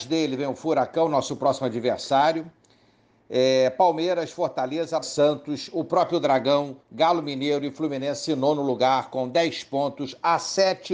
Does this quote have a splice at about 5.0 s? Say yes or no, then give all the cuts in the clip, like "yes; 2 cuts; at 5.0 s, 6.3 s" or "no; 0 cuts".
yes; 1 cut; at 5.0 s